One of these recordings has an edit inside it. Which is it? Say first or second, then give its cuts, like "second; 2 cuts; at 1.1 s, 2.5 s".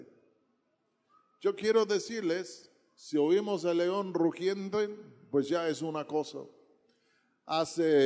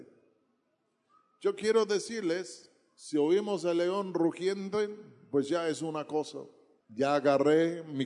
second; 1 cut; at 6.8 s